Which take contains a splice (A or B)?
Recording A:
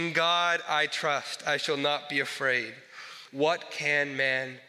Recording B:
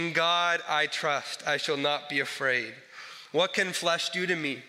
A